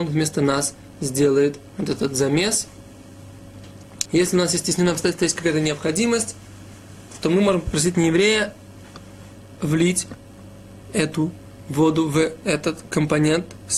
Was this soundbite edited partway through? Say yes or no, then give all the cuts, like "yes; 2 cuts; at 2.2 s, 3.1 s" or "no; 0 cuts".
yes; 1 cut; at 4.1 s